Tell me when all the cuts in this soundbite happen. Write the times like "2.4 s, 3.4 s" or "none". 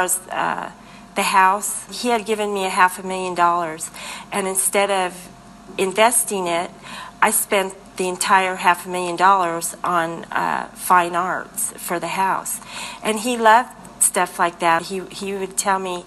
1.9 s, 14.8 s